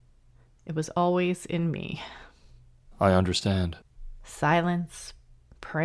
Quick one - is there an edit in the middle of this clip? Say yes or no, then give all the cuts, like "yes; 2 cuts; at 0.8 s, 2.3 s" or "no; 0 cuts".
no; 0 cuts